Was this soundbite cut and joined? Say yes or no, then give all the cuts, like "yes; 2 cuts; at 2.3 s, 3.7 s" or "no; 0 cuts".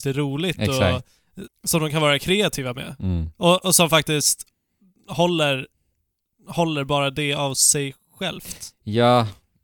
yes; 1 cut; at 1.5 s